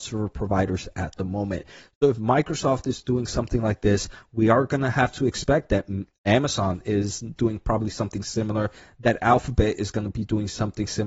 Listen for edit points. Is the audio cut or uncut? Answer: uncut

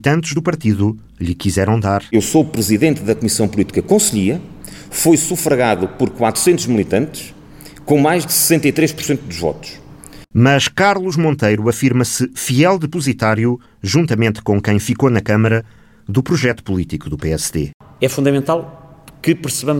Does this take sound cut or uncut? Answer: cut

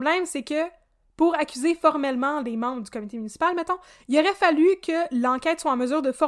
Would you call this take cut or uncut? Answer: uncut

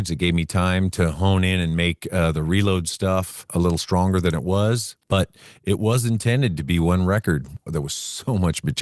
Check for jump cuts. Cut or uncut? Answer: cut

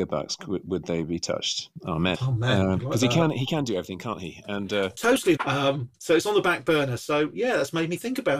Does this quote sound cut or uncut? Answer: cut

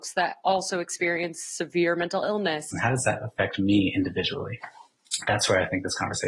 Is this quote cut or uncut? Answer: cut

